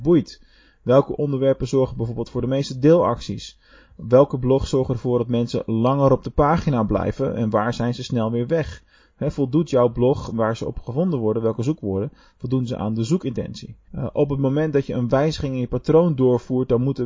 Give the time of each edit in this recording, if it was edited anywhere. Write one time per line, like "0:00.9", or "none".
0:13.9